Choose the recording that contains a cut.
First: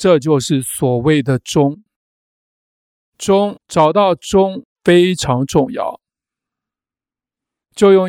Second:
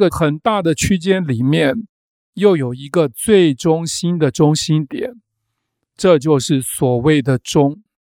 first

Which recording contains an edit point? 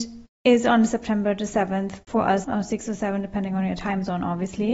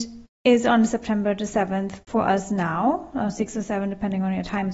first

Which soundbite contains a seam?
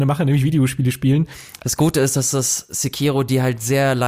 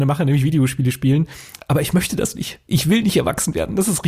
first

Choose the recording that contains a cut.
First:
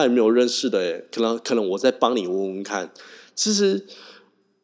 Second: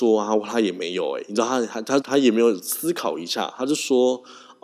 second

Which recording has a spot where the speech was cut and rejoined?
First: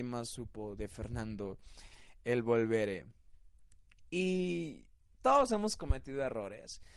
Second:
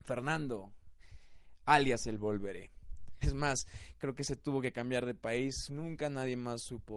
second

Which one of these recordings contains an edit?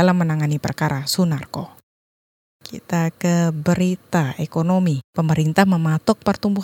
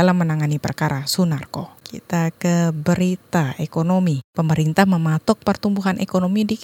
second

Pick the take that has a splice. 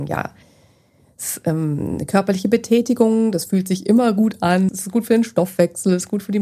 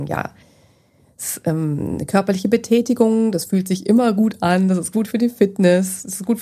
first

